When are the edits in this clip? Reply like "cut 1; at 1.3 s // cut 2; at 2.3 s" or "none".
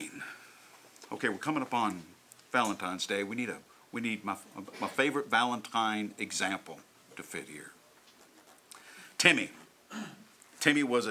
none